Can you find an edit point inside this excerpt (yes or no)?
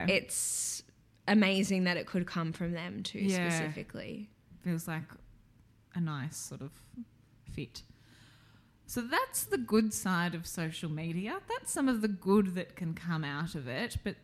no